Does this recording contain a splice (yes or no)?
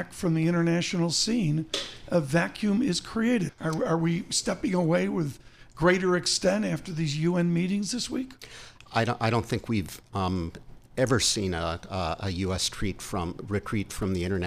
yes